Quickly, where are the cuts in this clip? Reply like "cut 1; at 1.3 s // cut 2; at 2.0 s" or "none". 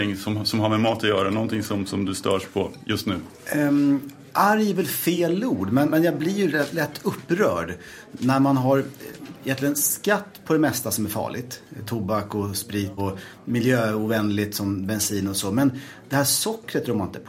cut 1; at 13.0 s

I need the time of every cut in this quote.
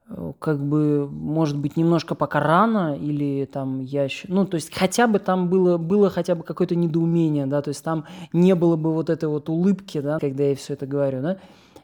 cut 1; at 10.2 s

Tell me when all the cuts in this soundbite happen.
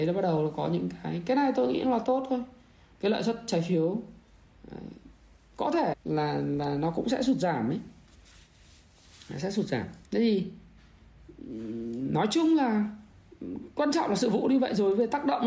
cut 1; at 5.9 s // cut 2; at 10.0 s

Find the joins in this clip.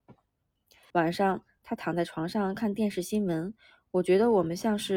cut 1; at 0.9 s

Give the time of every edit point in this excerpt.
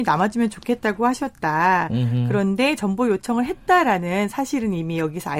none

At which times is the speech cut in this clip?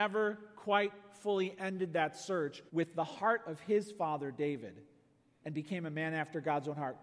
cut 1; at 2.7 s

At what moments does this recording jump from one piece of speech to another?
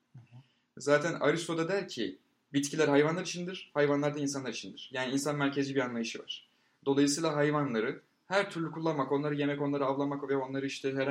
none

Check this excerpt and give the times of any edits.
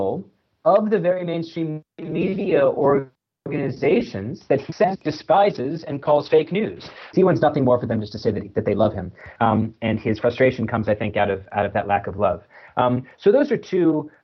cut 1; at 7.1 s

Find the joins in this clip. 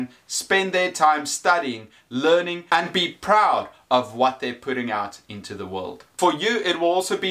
none

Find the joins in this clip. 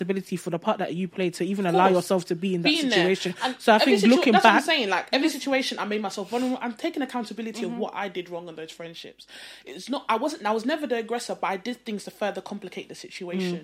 none

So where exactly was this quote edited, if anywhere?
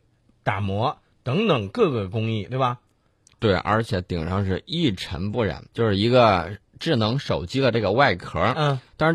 cut 1; at 3.3 s // cut 2; at 5.7 s

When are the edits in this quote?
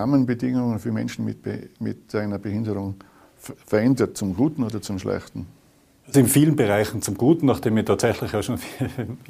none

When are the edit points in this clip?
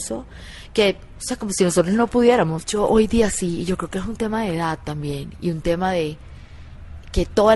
cut 1; at 2.6 s

